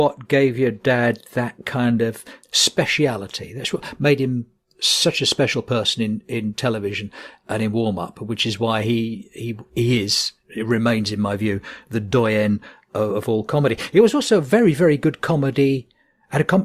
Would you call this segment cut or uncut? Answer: cut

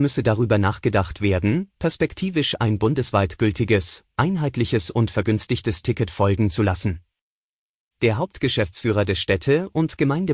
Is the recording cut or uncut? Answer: cut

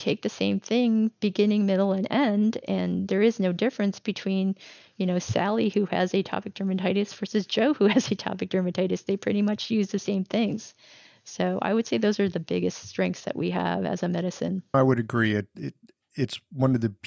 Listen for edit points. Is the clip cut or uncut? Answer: uncut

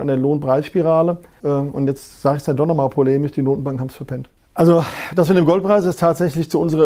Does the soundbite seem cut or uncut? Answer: cut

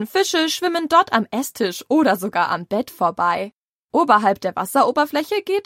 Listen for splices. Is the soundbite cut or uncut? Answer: uncut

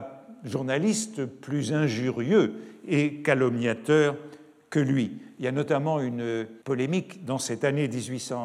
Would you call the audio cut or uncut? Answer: cut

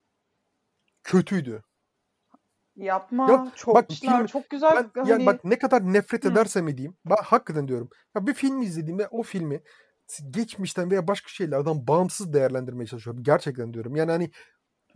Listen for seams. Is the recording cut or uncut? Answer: cut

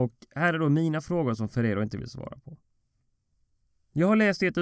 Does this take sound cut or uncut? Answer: uncut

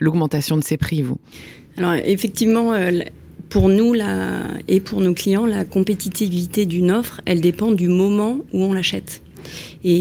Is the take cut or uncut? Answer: uncut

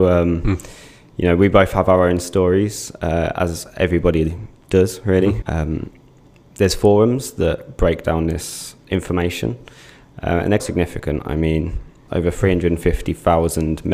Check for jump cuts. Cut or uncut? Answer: cut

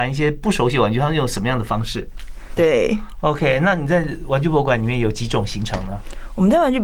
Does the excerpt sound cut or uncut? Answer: cut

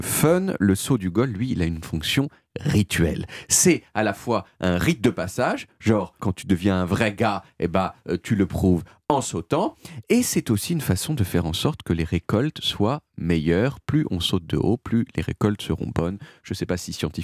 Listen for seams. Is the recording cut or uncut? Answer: cut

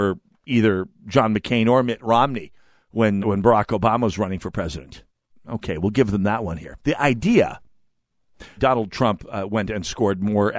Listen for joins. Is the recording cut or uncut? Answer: cut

